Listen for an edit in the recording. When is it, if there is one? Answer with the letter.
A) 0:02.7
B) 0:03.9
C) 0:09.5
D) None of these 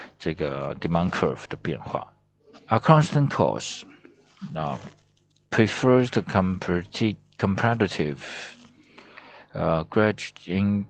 A